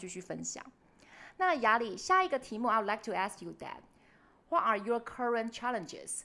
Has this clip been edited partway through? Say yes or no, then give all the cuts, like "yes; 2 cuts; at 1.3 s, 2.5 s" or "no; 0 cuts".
no; 0 cuts